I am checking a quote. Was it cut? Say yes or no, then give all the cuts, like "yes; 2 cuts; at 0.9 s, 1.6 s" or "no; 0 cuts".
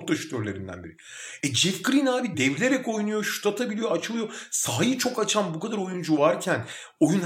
no; 0 cuts